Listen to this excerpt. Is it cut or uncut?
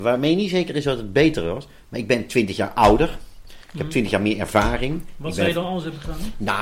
uncut